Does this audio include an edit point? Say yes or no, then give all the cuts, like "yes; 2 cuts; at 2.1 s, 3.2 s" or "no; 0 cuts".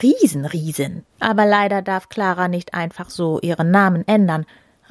yes; 1 cut; at 1.1 s